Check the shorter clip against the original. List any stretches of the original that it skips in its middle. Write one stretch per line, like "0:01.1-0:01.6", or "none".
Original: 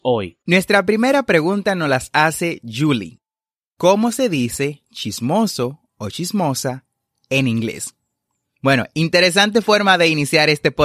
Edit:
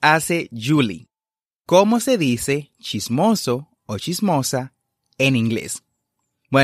none